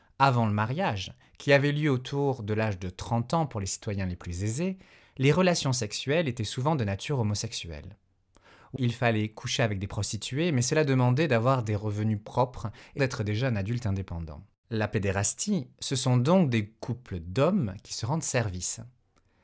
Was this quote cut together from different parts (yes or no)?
yes